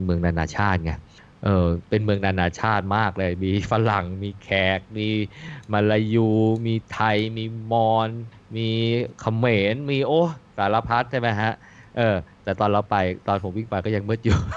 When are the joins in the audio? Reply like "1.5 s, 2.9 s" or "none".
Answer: none